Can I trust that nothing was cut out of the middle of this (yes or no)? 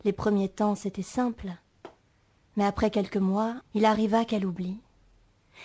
no